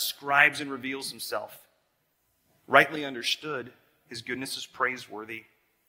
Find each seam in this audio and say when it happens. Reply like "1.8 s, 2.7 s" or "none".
none